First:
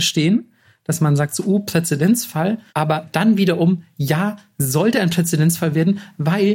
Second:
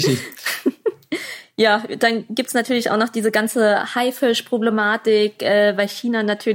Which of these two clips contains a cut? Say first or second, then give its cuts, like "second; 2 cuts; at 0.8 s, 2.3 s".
first; 1 cut; at 2.7 s